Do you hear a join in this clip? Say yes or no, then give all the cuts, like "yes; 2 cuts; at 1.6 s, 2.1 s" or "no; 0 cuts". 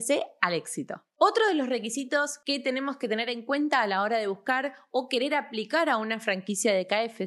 no; 0 cuts